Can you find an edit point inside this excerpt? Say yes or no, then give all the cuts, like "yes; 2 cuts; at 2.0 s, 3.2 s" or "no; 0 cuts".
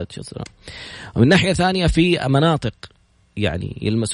no; 0 cuts